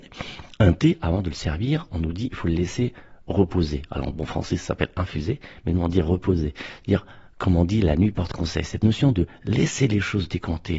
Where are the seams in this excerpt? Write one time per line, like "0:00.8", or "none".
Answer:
none